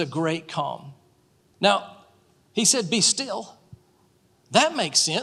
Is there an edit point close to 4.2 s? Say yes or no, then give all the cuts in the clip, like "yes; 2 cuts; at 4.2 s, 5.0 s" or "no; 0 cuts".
no; 1 cut; at 1.5 s